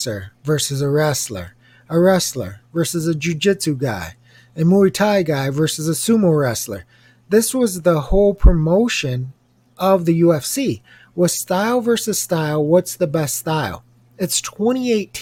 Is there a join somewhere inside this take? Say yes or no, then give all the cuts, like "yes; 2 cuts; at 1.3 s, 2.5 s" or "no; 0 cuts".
no; 0 cuts